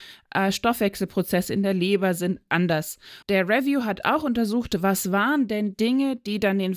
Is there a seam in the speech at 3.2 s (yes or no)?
yes